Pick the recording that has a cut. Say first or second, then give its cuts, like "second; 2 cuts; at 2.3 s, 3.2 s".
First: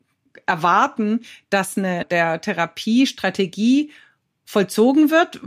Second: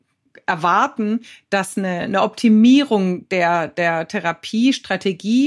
first; 1 cut; at 2.0 s